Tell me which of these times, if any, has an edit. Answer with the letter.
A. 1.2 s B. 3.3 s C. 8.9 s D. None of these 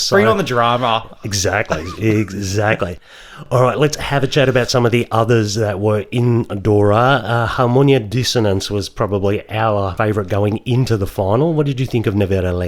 D